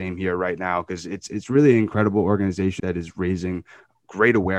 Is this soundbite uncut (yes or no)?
no